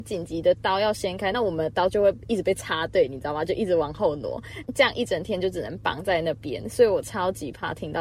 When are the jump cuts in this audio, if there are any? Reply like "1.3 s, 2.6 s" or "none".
none